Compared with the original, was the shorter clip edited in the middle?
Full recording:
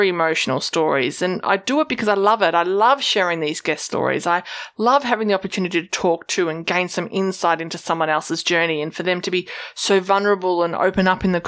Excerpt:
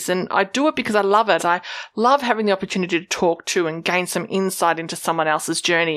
yes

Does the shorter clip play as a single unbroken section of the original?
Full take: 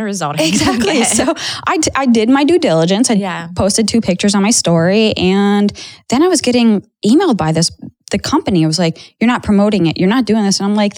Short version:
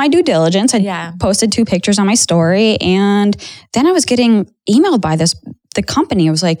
yes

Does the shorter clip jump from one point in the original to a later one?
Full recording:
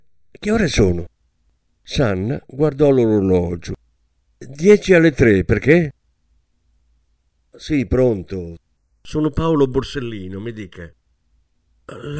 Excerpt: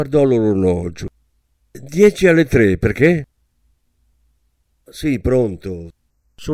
no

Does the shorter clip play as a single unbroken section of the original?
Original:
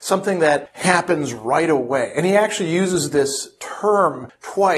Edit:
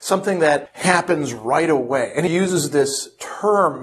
no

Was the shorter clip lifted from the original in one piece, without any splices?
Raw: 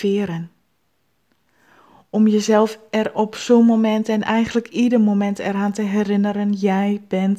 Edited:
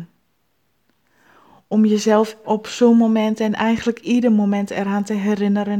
no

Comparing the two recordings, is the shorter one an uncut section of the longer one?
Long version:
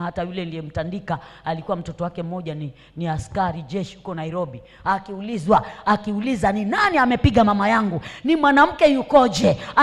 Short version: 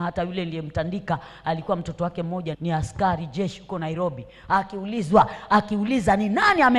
no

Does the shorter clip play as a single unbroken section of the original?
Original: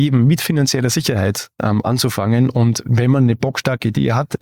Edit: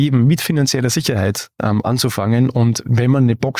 yes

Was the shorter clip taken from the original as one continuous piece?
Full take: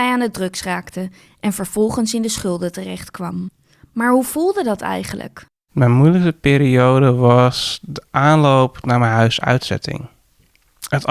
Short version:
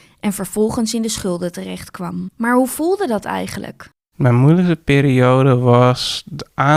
no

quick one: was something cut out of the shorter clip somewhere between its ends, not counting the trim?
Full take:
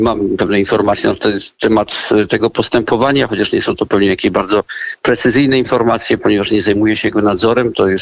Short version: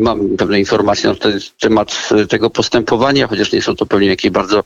no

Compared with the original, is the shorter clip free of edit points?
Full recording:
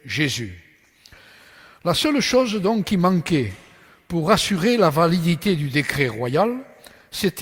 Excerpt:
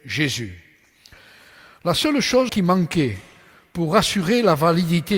no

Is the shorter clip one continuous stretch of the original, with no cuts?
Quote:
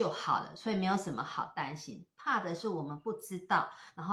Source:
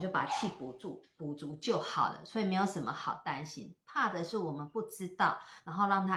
yes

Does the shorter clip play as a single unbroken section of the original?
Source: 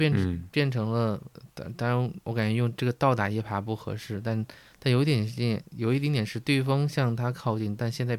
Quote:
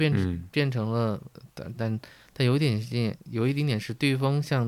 no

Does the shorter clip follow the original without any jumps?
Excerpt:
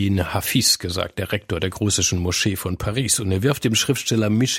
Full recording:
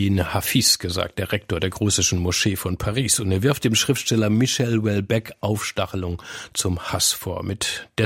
yes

